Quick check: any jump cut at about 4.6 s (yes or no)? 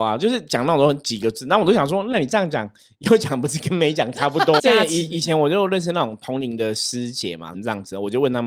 yes